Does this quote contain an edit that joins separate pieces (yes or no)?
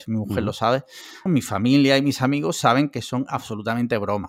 yes